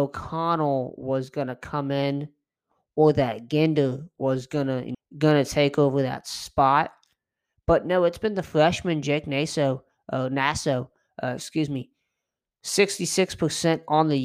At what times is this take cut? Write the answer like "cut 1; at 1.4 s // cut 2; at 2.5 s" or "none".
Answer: cut 1; at 4.9 s